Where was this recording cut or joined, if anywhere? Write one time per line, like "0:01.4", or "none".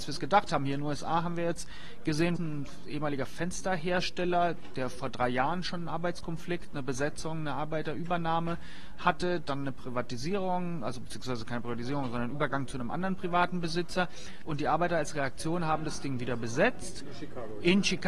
0:02.4
0:14.5